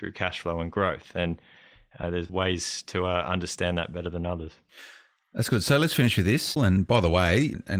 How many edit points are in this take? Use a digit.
1